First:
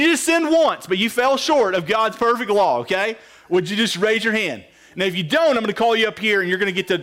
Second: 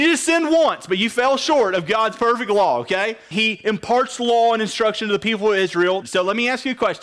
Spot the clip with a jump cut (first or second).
second